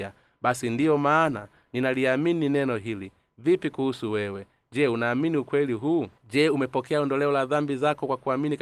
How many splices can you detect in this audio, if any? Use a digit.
1